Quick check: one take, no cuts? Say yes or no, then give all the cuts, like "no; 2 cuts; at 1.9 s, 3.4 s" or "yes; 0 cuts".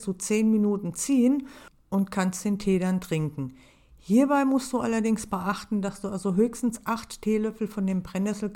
yes; 0 cuts